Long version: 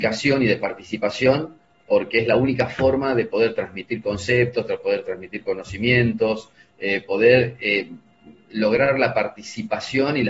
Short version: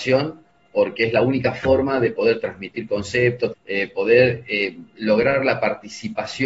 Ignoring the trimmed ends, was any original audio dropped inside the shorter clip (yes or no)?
yes